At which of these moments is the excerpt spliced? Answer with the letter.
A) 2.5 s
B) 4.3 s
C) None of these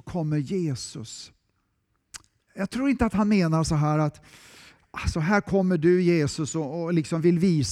A